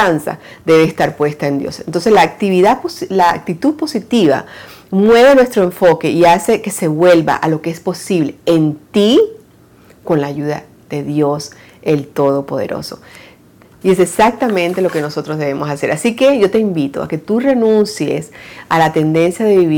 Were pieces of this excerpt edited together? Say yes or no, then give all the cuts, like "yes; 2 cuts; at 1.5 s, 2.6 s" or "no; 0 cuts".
yes; 1 cut; at 13.8 s